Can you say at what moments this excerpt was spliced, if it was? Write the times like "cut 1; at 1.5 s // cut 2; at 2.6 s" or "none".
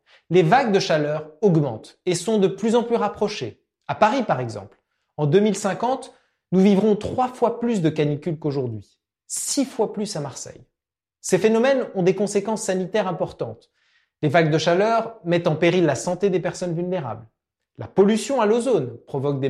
none